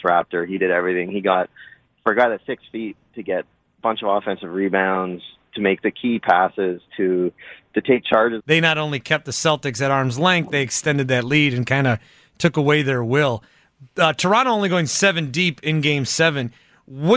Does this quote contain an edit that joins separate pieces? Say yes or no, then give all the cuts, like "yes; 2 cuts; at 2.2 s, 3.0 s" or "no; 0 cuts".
yes; 1 cut; at 8.4 s